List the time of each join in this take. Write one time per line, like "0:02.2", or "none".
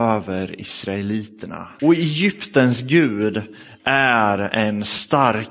0:01.8